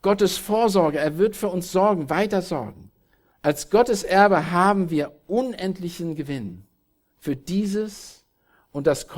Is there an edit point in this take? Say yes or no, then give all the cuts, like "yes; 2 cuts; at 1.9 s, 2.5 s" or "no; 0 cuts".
yes; 1 cut; at 3.3 s